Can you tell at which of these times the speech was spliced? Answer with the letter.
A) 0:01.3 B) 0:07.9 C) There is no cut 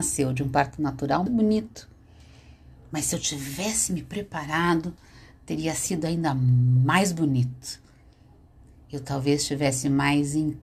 A